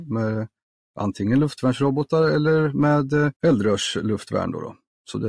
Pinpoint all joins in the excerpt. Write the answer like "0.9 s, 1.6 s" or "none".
3.4 s